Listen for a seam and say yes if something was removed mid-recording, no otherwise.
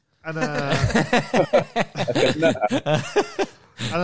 no